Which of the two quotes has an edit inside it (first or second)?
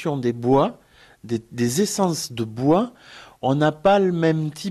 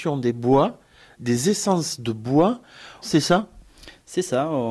second